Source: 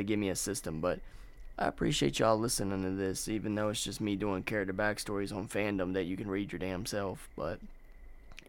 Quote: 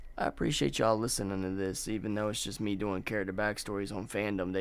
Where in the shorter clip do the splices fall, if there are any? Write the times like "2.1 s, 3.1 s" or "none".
none